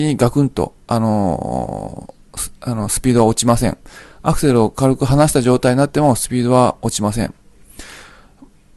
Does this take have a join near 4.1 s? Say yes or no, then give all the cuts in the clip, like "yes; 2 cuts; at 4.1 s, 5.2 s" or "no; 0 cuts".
no; 0 cuts